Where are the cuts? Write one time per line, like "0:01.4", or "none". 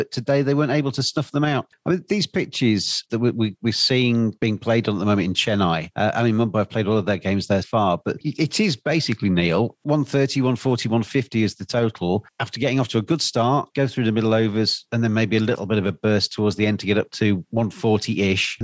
0:01.7
0:07.6